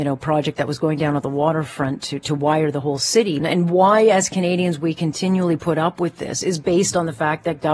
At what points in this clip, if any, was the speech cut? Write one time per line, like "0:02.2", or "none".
0:03.4